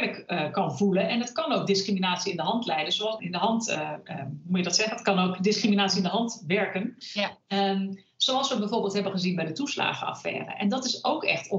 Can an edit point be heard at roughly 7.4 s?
no; 1 cut; at 3.2 s

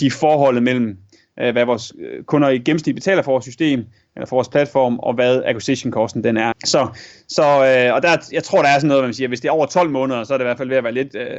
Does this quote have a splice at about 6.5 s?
yes; 1 cut; at 6.5 s

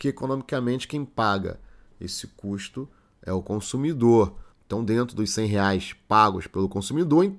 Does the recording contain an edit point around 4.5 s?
yes; 1 cut; at 4.5 s

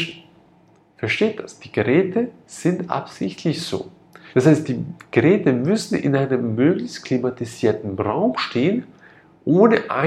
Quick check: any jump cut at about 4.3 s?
yes; 1 cut; at 4.3 s

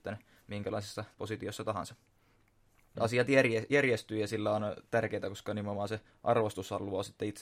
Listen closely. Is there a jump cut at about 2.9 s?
yes; 1 cut; at 2.9 s

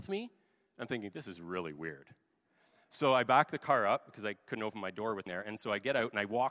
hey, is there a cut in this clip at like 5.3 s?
yes; 1 cut; at 5.3 s

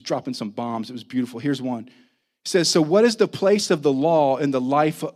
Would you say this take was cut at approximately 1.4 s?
no; 0 cuts

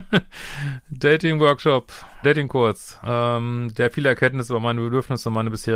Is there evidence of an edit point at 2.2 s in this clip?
yes; 1 cut; at 2.2 s

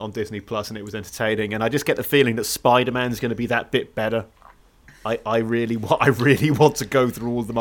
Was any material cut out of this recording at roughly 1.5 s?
no; 0 cuts

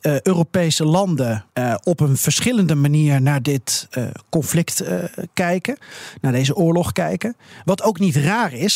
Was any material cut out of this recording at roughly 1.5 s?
yes; 1 cut; at 1.5 s

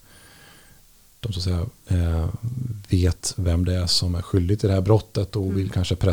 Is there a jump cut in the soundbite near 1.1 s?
no; 0 cuts

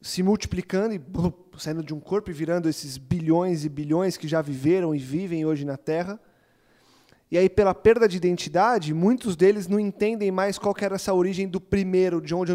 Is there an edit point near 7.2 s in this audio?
no; 0 cuts

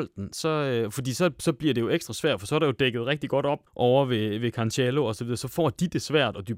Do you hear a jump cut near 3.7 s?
yes; 1 cut; at 3.7 s

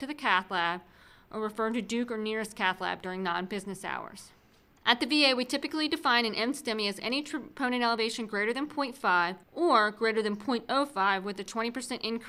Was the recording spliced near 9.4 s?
yes; 2 cuts; at 4.8 s, 9.4 s

